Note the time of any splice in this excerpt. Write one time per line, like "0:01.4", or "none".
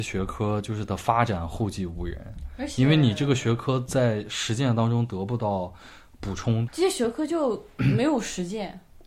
0:06.7